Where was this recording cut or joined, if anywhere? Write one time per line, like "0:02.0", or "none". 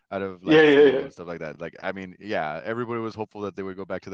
none